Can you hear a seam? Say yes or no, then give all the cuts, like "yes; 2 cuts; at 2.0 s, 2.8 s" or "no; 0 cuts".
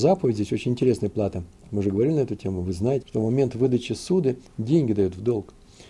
yes; 2 cuts; at 3.0 s, 4.5 s